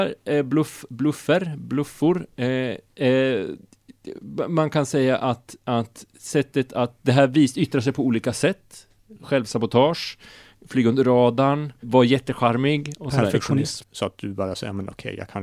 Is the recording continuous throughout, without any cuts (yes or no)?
no